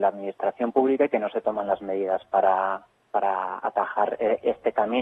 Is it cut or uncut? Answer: uncut